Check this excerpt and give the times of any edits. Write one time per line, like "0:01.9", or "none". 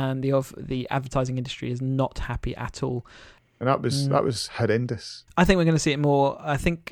0:03.4
0:05.3